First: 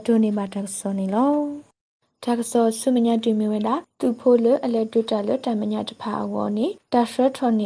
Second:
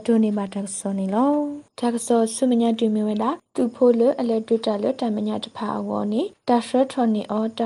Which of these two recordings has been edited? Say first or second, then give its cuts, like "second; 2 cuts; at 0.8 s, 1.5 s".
second; 1 cut; at 1.7 s